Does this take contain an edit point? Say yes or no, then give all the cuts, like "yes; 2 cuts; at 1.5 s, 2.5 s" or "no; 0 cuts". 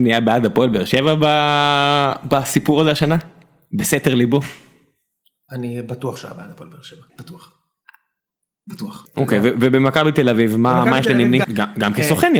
yes; 3 cuts; at 7.1 s, 9.0 s, 11.4 s